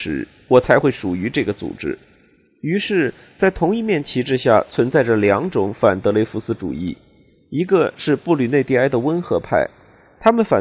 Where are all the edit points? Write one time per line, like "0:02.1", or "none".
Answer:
none